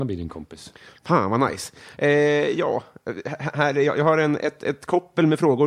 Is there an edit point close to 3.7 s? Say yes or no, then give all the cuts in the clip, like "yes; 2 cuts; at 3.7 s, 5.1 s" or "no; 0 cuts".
no; 0 cuts